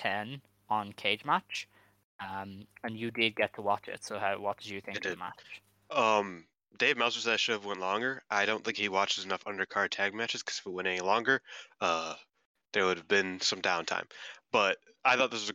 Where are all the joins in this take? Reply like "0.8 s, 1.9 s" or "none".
none